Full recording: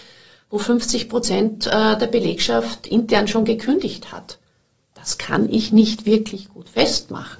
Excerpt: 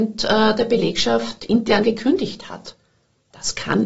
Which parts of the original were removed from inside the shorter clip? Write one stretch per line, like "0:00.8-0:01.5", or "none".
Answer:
0:03.3-0:03.5